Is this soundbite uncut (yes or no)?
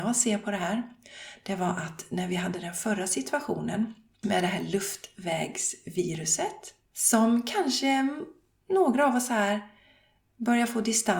yes